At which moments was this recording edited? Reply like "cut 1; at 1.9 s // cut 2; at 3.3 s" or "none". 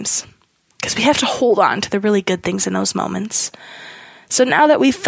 none